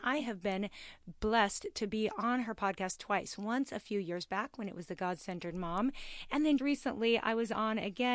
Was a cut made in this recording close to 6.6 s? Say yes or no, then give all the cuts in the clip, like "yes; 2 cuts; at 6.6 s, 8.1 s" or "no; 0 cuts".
yes; 1 cut; at 6.6 s